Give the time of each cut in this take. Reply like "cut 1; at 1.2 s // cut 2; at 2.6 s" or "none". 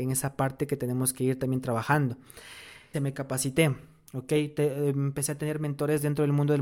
cut 1; at 2.9 s